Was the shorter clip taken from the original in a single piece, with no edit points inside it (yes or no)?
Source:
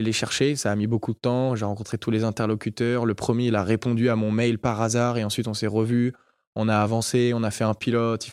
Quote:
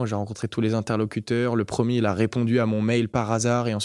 yes